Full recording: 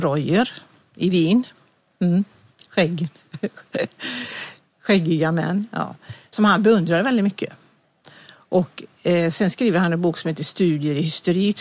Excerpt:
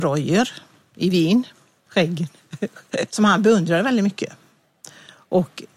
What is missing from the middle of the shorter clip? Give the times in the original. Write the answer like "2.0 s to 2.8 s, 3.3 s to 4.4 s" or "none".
1.8 s to 2.7 s, 3.9 s to 6.3 s